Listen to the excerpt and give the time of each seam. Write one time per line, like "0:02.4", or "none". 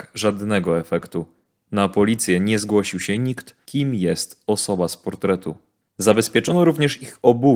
0:03.7
0:05.8